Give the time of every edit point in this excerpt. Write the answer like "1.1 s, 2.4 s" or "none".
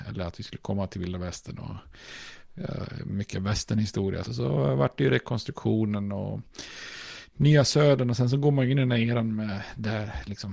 4.2 s

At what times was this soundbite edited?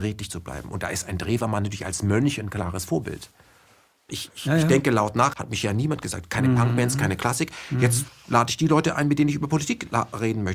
4.1 s, 5.3 s

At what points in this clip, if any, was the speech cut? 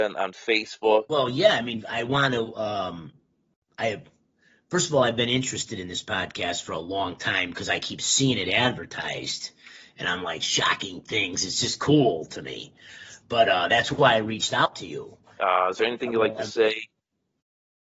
1.1 s, 15.4 s

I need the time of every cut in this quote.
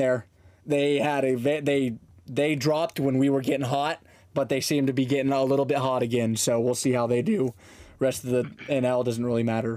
none

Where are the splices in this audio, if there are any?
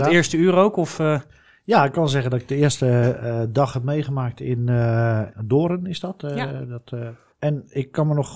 none

